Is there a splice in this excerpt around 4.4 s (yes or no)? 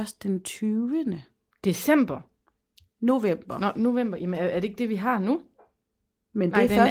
no